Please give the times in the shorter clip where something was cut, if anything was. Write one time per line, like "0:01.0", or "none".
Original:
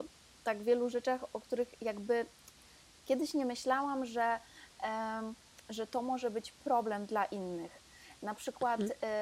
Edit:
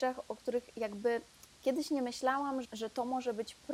0:01.5
0:02.6